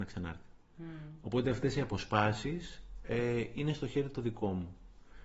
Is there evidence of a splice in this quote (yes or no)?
no